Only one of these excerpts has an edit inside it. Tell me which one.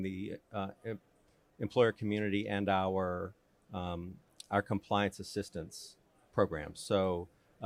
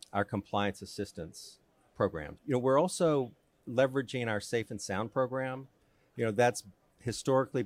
second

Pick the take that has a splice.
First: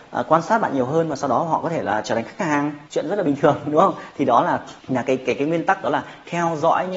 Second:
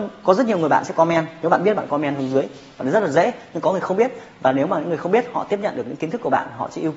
first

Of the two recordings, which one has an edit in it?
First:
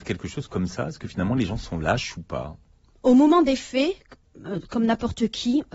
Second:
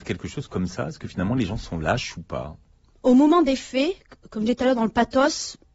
first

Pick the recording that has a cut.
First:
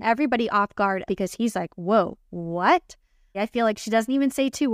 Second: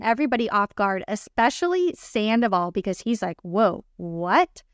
first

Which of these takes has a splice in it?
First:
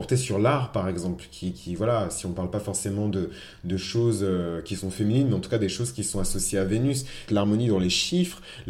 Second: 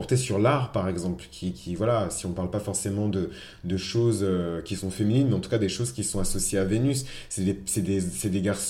first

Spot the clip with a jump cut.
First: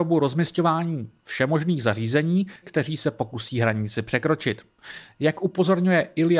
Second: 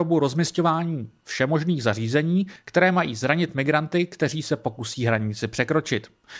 first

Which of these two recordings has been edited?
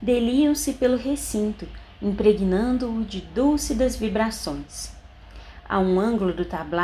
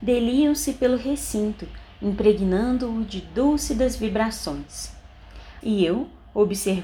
second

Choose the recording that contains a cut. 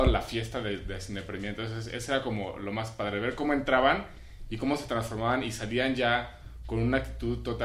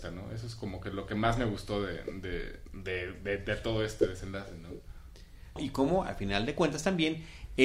second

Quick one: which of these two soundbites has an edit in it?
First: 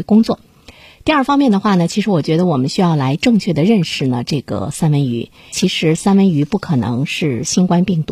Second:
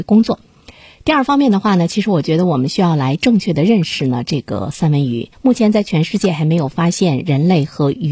second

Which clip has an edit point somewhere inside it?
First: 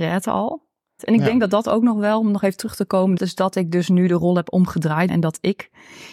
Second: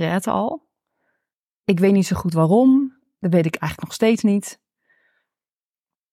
first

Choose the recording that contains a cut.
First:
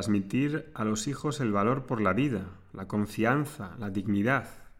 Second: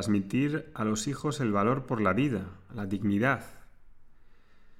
second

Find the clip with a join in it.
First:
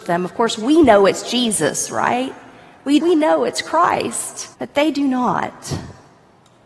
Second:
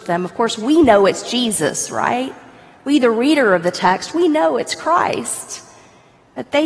first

